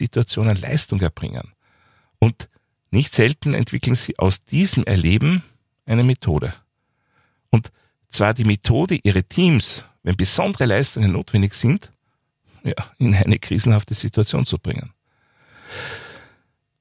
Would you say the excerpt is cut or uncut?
uncut